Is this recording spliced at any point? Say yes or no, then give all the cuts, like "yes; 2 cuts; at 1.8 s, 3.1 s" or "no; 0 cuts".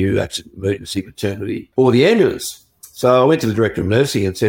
yes; 1 cut; at 1.7 s